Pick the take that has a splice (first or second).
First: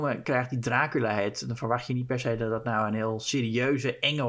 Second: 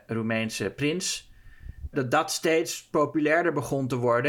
second